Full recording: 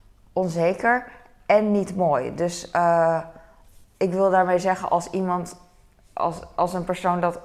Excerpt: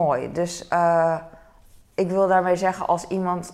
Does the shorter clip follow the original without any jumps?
yes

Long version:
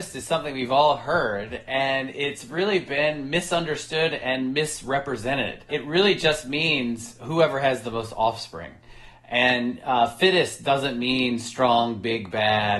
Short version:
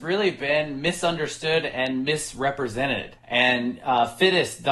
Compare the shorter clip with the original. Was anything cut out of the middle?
yes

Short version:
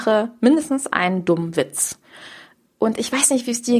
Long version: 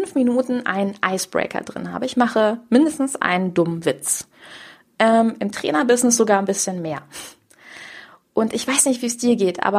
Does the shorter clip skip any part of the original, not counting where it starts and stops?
yes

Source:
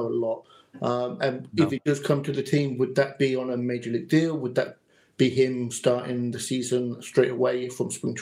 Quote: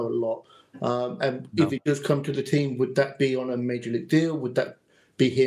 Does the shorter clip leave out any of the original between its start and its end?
no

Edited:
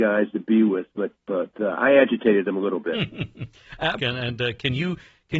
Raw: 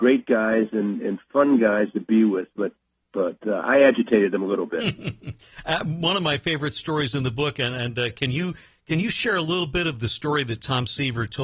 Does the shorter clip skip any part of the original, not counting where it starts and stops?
yes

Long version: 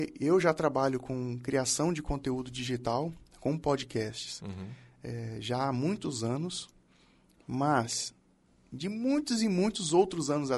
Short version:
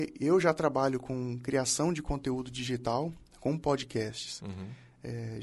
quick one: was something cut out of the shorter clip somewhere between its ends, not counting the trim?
no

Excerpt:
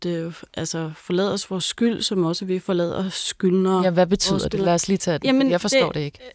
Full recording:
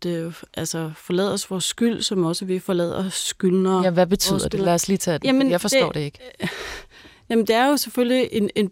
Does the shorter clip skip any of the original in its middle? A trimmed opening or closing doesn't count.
no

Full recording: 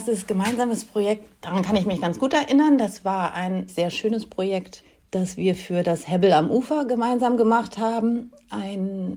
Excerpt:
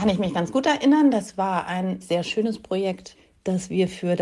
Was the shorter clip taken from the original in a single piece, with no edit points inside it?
yes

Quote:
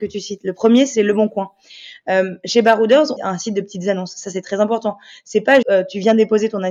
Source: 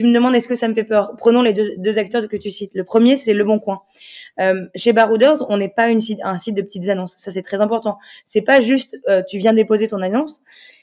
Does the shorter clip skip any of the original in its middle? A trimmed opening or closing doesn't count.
yes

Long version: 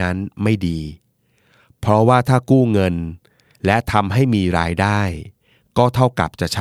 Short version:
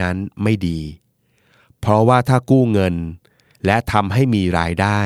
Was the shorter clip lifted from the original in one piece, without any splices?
yes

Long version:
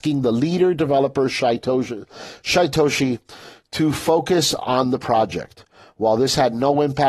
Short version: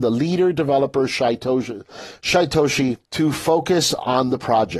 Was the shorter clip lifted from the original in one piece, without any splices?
no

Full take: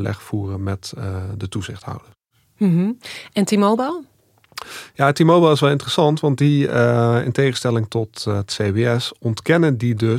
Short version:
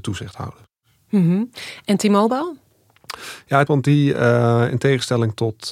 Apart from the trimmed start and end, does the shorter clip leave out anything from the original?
yes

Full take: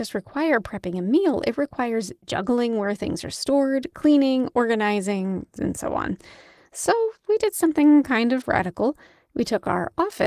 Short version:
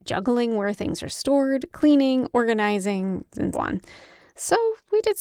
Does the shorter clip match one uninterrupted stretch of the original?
no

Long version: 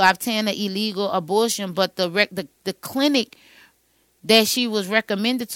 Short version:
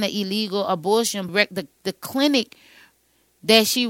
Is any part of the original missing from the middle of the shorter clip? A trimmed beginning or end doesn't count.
yes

